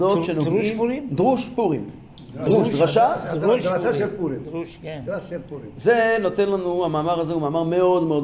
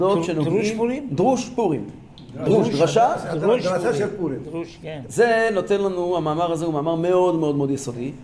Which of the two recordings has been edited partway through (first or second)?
second